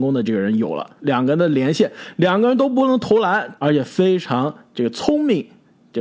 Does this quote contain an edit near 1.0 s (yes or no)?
yes